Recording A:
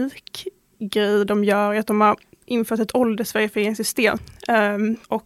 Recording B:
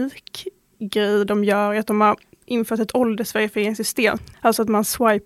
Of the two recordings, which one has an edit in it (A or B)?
B